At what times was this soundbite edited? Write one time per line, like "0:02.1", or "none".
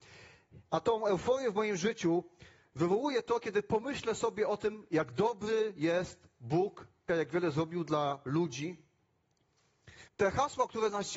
0:07.1
0:10.1

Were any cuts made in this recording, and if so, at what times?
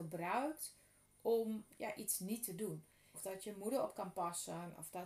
0:01.7
0:03.1

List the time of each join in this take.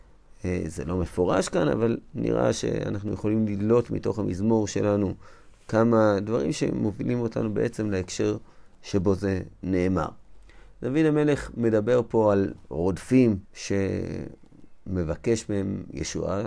0:13.4

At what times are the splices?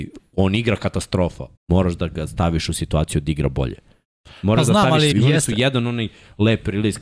0:01.6
0:05.1

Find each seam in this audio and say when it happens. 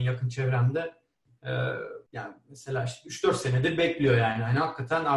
0:02.1

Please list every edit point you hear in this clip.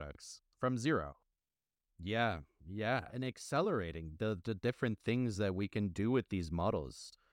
0:01.9
0:03.1

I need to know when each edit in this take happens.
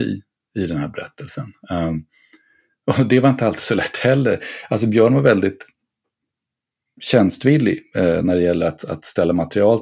none

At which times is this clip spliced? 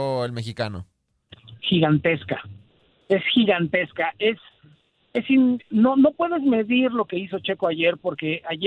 none

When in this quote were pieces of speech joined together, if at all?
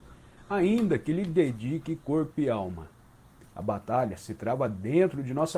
0:03.4

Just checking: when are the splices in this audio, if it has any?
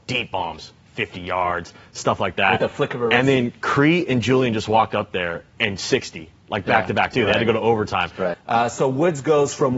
0:07.1
0:08.3

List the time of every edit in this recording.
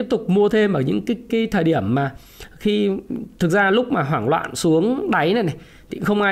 0:01.3

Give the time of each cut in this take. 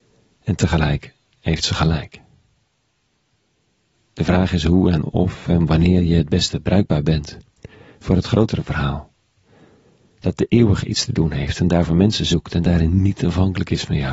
0:03.9

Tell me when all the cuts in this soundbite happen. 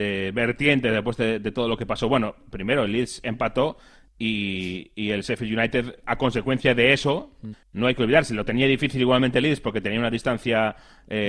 0:07.5

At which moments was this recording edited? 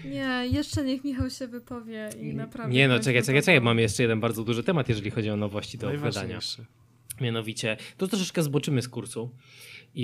none

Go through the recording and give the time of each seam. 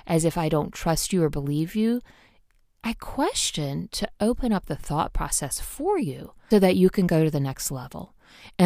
0:06.5

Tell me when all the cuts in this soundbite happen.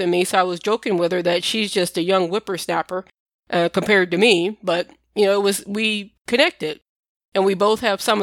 none

